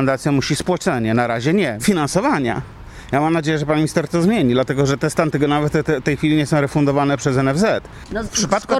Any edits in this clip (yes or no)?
yes